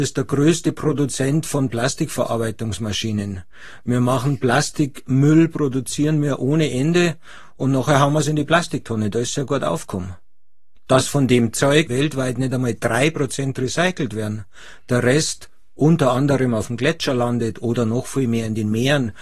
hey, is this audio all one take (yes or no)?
no